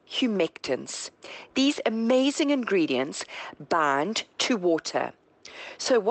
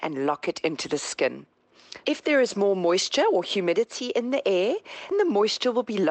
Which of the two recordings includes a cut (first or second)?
second